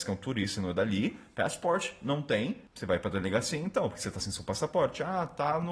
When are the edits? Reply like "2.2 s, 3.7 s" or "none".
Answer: 2.7 s